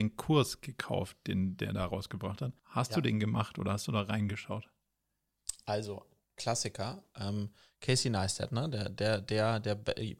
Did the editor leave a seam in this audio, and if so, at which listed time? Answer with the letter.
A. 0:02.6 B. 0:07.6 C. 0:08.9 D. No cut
A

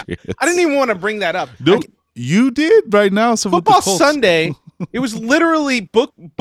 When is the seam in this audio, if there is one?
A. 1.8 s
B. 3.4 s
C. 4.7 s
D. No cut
A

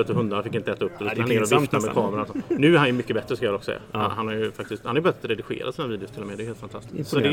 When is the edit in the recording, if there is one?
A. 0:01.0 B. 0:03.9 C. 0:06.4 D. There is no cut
D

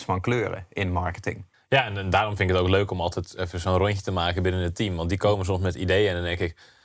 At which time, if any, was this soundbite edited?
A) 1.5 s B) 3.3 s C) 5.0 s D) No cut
A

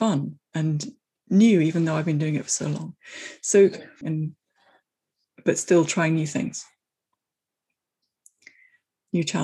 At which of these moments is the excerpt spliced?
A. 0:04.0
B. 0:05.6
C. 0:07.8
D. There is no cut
A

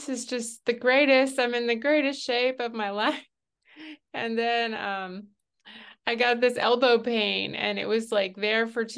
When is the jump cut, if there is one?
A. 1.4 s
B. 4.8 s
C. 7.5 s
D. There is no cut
D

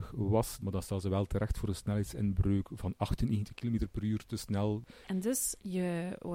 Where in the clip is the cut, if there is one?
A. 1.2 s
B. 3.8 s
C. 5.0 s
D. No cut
C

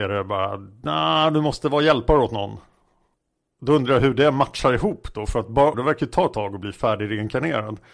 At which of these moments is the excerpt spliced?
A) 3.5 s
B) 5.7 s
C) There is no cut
B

